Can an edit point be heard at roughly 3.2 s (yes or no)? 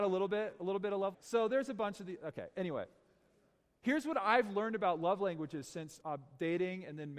no